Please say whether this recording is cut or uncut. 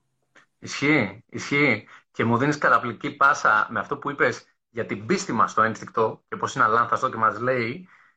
uncut